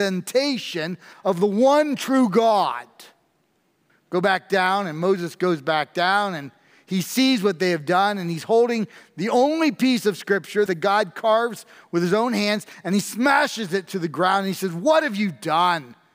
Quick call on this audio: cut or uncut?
cut